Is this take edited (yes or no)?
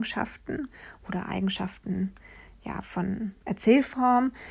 yes